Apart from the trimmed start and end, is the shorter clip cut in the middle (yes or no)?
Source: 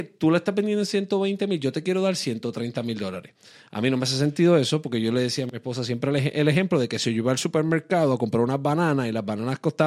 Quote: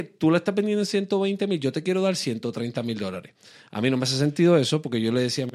no